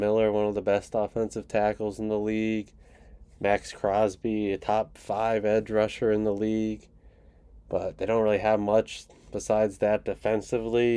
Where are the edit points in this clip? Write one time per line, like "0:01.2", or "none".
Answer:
none